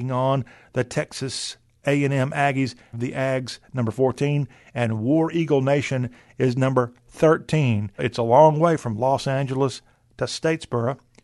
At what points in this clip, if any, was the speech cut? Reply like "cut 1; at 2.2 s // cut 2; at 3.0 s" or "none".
cut 1; at 2.9 s // cut 2; at 8.0 s